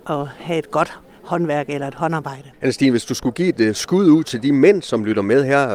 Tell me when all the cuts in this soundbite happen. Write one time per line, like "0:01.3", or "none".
0:02.5